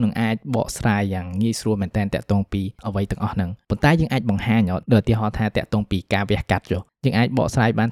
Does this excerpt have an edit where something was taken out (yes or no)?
no